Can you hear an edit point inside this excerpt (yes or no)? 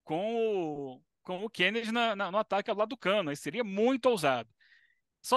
no